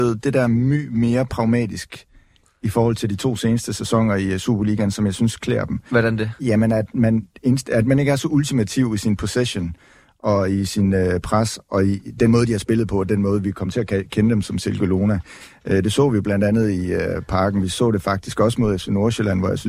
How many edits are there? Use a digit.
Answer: 0